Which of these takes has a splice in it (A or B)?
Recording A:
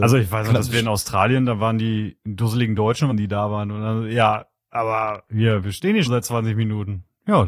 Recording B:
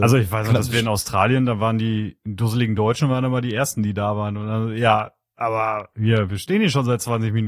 A